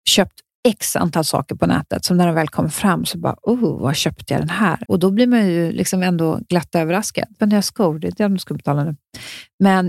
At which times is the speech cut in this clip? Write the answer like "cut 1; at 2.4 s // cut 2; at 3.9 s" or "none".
cut 1; at 4.8 s // cut 2; at 7.4 s